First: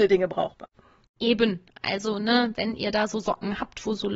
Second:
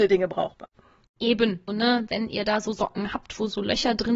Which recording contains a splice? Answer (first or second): second